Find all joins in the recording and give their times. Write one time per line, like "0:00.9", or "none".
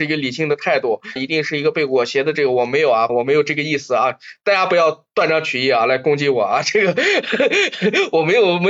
0:01.2
0:03.1

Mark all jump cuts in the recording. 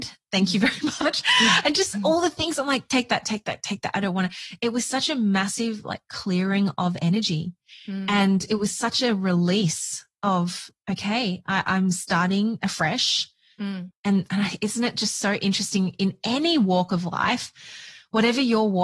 0:13.9

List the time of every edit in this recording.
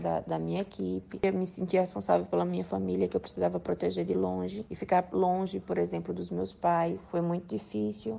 none

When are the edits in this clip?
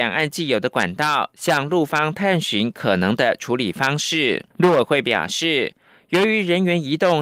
0:04.5

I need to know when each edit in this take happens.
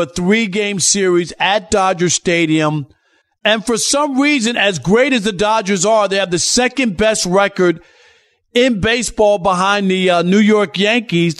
none

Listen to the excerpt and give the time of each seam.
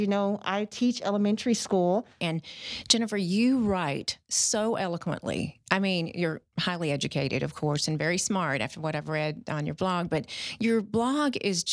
0:02.2

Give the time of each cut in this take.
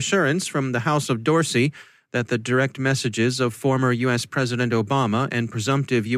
none

